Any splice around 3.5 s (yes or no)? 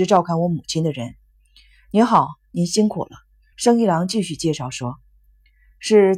yes